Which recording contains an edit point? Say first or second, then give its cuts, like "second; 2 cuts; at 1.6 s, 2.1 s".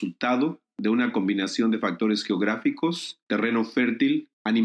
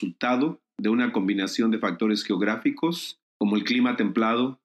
first; 1 cut; at 3.3 s